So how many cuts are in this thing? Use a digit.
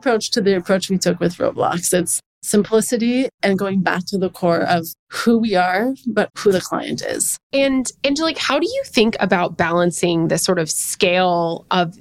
2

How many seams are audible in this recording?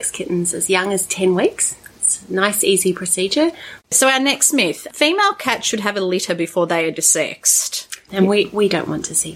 2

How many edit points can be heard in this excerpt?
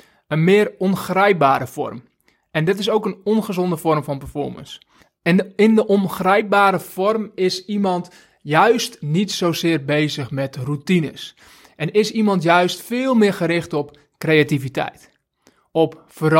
0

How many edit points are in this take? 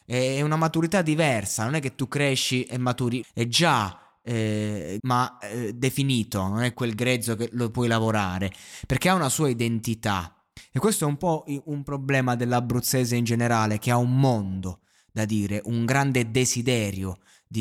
3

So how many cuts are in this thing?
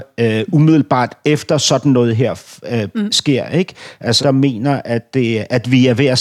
1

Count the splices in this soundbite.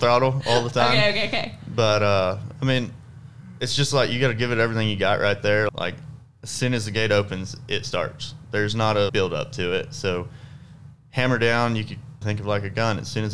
3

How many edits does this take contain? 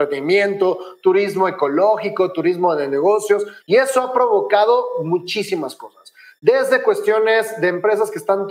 1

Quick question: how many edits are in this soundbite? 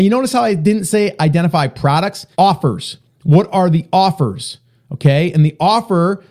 1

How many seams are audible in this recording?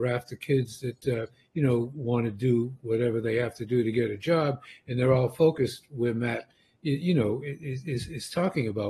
0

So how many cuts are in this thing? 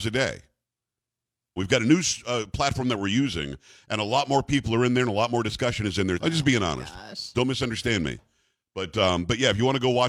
3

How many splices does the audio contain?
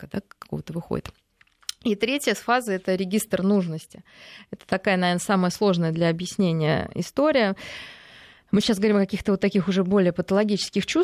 0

